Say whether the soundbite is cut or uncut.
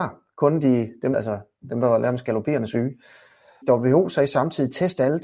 cut